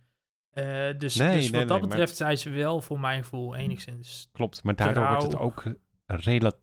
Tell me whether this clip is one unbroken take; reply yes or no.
yes